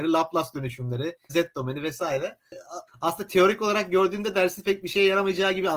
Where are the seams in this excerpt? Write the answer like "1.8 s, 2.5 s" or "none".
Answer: 1.3 s, 2.9 s